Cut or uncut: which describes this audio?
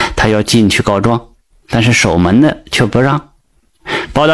uncut